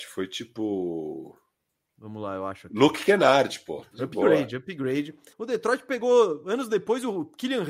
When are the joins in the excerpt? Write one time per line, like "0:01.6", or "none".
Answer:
0:03.9
0:05.3